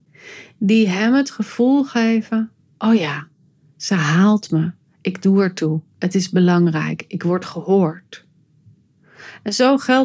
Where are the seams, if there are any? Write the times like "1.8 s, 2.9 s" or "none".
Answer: none

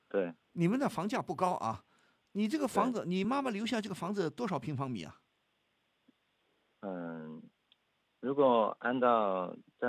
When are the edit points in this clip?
none

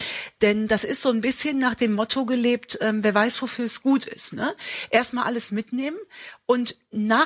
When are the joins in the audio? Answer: none

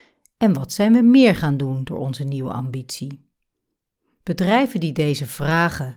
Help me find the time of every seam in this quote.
none

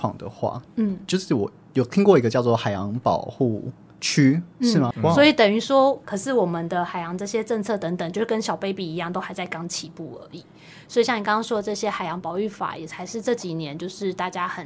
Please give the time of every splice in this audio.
4.9 s, 6.0 s

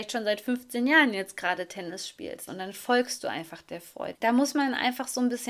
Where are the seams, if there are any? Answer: 2.5 s, 4.1 s

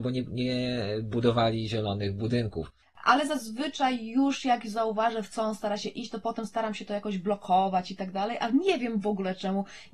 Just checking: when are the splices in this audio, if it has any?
2.8 s

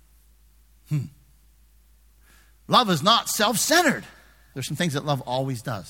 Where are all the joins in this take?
4.5 s

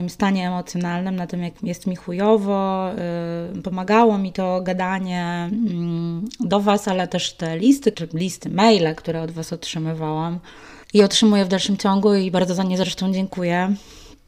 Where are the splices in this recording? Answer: 7.9 s, 10.8 s

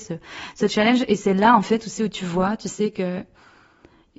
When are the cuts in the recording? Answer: none

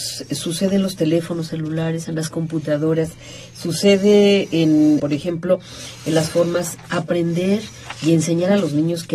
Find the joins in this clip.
5.0 s

